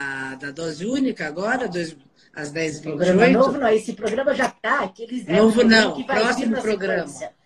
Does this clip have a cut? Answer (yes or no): no